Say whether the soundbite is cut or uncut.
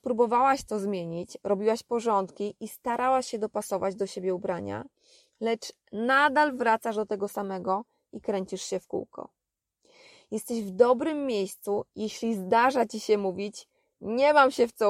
uncut